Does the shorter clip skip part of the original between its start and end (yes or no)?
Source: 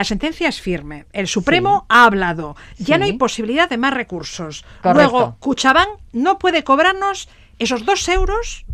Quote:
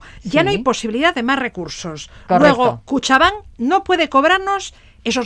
no